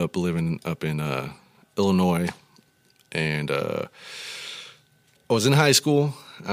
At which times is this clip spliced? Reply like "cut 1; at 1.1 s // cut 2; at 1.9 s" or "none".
cut 1; at 5.2 s

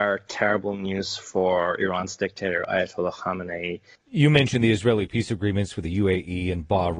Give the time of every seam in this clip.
cut 1; at 4.0 s

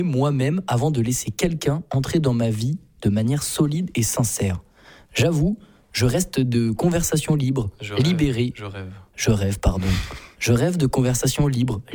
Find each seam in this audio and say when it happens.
none

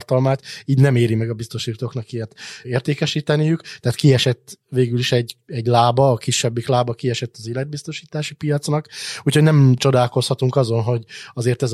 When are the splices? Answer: none

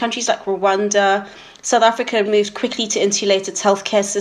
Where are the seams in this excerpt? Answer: cut 1; at 2.3 s

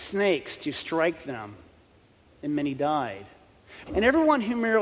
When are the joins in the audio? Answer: cut 1; at 3.9 s

